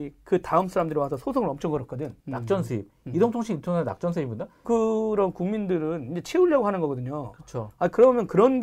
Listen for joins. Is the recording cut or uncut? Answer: cut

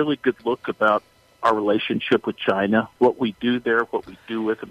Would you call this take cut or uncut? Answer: uncut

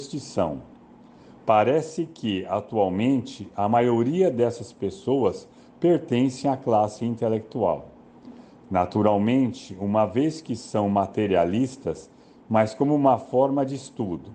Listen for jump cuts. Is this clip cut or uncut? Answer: cut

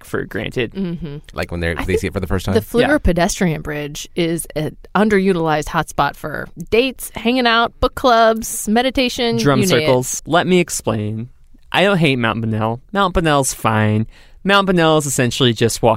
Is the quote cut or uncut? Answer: cut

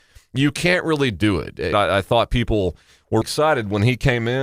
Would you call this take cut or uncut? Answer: cut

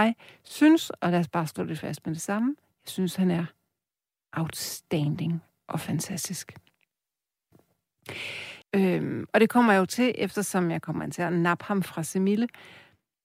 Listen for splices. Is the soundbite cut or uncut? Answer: cut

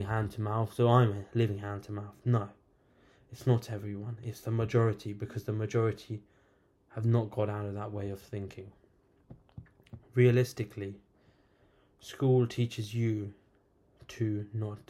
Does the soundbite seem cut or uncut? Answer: uncut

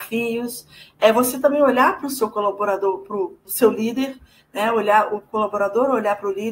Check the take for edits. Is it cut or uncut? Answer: uncut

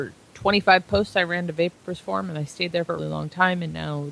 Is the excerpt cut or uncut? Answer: cut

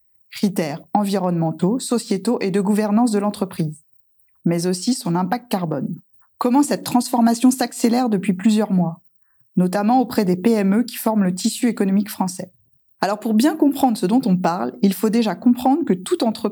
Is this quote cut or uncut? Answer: cut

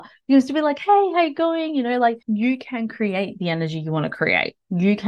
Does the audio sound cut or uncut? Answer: cut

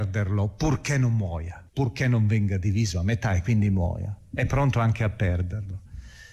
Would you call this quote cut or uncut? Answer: cut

